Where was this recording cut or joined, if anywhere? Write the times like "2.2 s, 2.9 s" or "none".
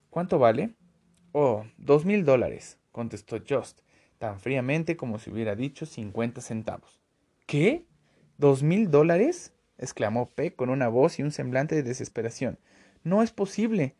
none

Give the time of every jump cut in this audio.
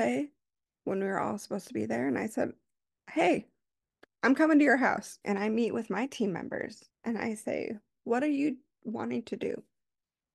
5.2 s, 6.9 s

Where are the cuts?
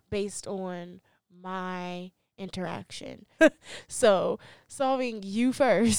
3.4 s

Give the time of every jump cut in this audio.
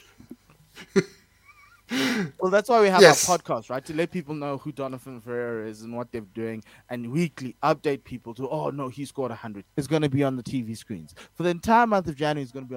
9.6 s

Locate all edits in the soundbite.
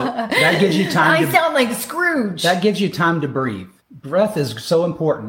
3.8 s

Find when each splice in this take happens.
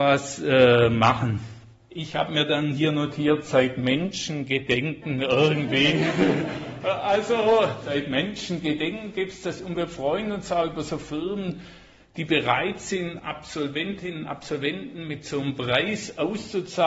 1.9 s

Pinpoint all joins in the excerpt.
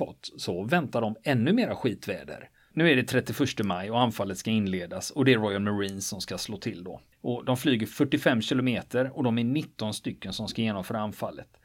2.7 s, 7.1 s

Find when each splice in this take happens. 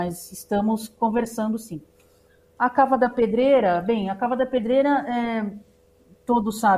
none

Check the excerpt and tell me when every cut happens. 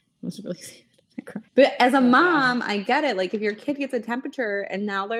1.5 s

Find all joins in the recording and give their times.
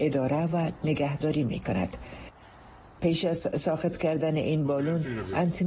3.0 s

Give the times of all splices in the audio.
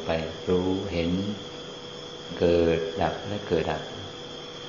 3.6 s

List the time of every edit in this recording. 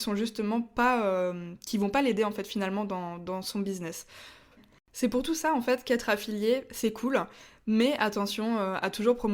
4.6 s

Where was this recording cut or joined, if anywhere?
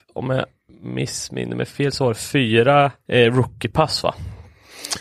3.0 s

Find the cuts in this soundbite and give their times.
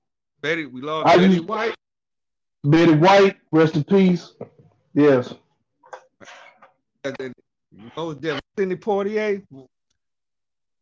none

